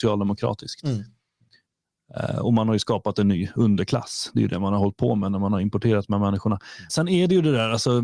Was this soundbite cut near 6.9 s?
yes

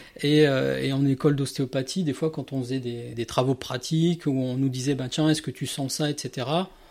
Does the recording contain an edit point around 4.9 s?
no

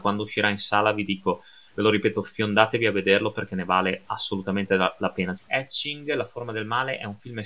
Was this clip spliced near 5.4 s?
yes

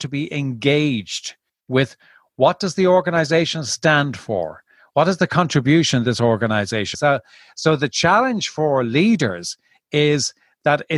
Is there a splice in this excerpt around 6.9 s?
yes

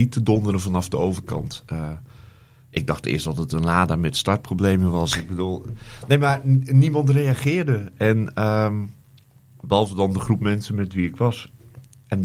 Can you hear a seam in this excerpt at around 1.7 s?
no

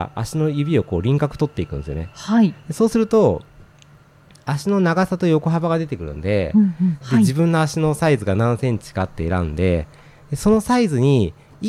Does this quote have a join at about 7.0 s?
yes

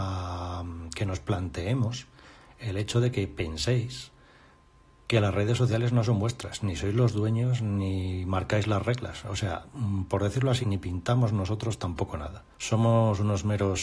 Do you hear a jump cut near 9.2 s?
no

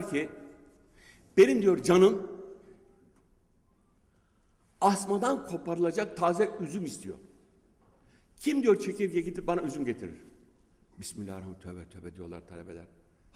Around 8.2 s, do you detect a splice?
no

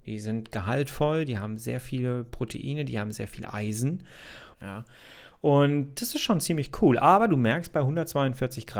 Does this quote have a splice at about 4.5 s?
yes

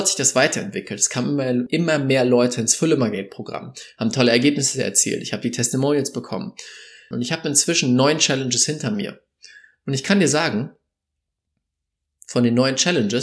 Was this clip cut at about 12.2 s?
no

